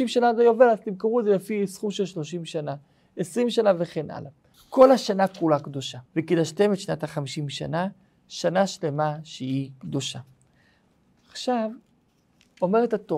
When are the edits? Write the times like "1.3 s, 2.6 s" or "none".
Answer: 4.5 s, 6.1 s